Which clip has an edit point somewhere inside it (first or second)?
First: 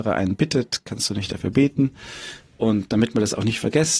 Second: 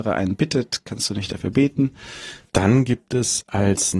second